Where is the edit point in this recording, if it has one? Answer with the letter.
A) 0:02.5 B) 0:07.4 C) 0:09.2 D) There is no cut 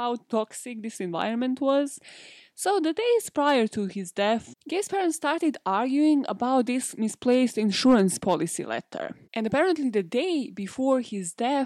C